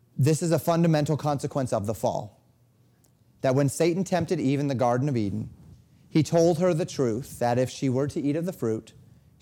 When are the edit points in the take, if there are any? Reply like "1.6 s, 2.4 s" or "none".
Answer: none